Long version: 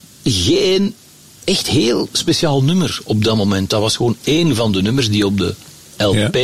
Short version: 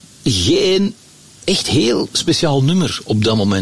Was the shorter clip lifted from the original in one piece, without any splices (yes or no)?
yes